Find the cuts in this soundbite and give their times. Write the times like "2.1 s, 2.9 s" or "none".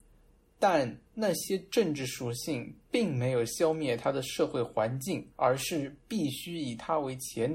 5.3 s